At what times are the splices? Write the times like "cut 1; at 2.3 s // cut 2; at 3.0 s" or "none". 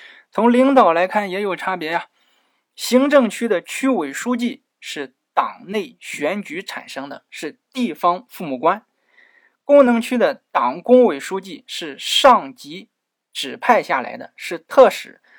none